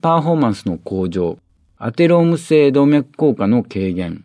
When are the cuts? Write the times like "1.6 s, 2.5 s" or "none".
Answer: none